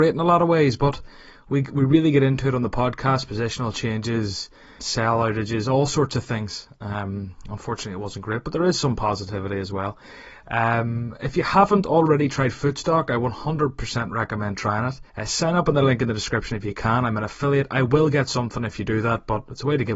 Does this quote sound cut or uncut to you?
cut